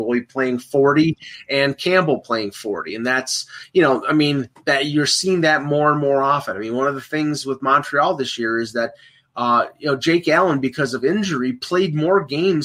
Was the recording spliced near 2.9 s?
no; 0 cuts

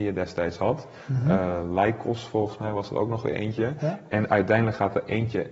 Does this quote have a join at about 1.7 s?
no; 0 cuts

